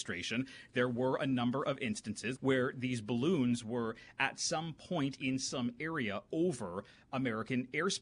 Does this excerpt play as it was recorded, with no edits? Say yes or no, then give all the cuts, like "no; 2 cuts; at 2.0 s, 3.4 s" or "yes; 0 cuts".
no; 1 cut; at 2.3 s